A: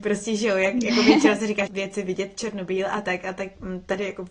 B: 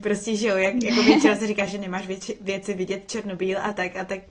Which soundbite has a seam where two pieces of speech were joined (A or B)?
A